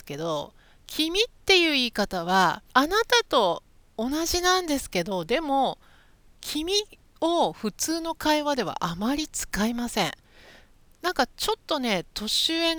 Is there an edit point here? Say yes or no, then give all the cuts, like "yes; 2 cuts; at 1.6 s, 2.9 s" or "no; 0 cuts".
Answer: yes; 1 cut; at 2.7 s